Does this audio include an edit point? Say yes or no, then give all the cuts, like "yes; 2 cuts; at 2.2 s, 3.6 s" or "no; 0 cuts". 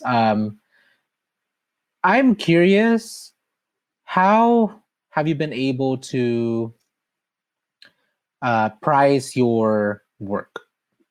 no; 0 cuts